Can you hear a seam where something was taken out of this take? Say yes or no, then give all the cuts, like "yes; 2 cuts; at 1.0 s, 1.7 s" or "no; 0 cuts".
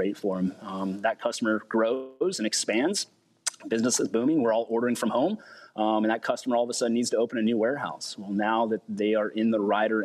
no; 0 cuts